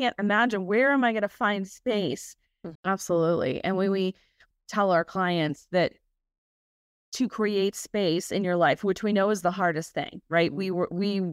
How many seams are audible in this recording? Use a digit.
2